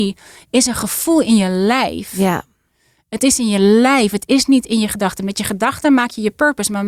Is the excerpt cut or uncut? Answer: uncut